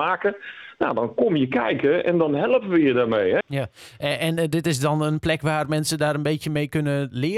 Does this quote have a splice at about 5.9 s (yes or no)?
no